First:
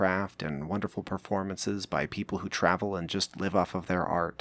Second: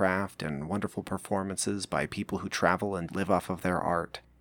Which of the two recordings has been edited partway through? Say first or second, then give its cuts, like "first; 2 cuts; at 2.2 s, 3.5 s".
second; 1 cut; at 3.1 s